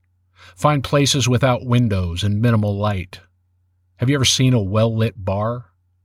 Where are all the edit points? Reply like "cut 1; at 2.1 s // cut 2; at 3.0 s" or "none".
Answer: none